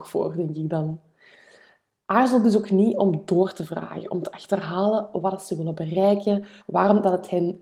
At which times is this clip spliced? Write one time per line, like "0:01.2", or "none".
0:06.6

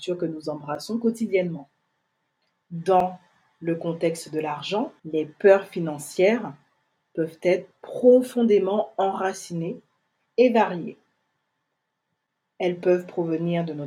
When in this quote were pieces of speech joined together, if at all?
0:02.6
0:05.0

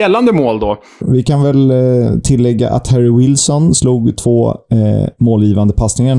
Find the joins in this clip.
0:01.0

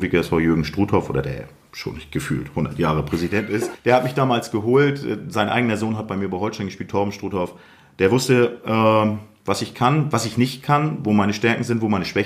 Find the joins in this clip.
0:03.7

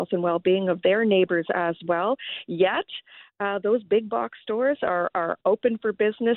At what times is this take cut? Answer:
none

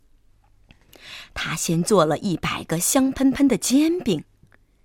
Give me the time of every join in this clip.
none

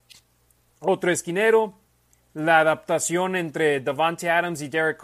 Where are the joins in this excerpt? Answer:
none

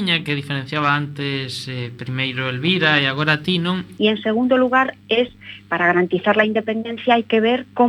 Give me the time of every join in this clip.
0:04.0

